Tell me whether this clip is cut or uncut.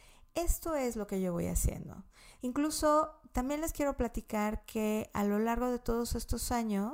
cut